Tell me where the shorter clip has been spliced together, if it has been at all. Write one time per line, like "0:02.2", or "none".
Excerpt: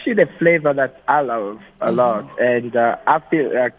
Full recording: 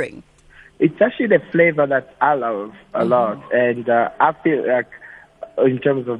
none